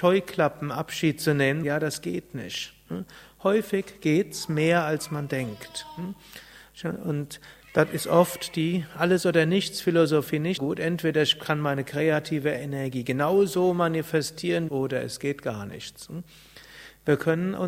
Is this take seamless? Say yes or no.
no